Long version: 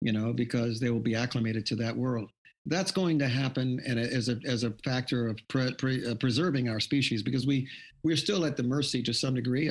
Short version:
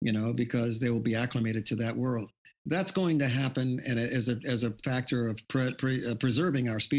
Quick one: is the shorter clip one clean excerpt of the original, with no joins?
yes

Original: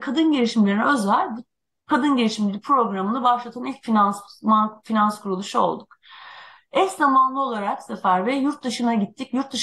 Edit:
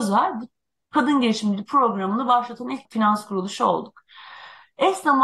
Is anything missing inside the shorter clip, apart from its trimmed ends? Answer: yes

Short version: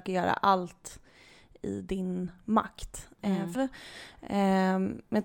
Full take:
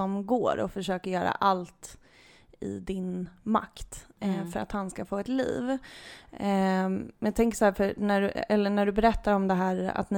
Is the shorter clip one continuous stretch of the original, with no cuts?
no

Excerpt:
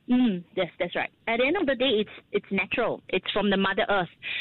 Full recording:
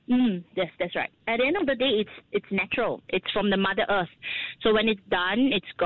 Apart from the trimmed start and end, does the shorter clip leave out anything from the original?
no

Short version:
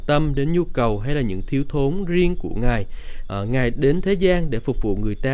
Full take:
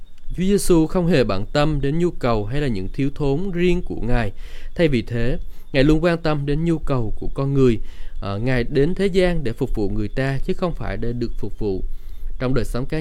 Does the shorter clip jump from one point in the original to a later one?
yes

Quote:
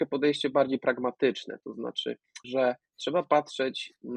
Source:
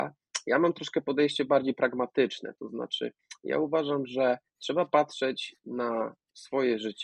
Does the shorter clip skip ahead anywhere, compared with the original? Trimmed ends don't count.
yes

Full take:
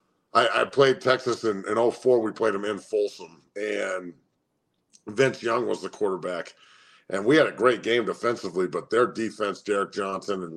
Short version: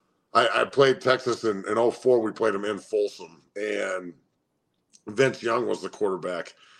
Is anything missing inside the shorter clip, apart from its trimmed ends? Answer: no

